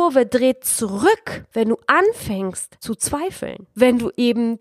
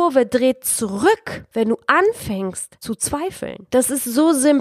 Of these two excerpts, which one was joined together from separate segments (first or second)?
second